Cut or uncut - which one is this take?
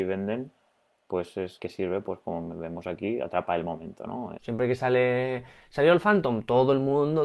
cut